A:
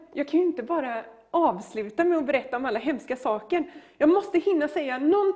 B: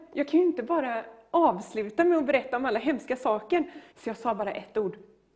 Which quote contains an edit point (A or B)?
B